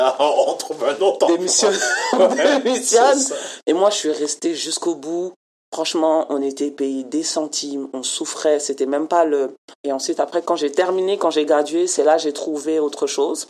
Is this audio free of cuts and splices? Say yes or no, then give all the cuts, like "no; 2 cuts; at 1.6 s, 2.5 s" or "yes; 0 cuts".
no; 1 cut; at 9.8 s